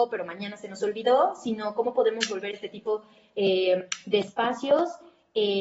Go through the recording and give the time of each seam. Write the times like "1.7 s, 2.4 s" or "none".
none